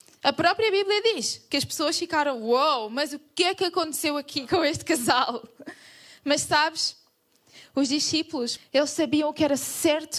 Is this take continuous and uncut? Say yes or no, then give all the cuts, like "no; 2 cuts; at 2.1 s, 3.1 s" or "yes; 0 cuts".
no; 1 cut; at 8.6 s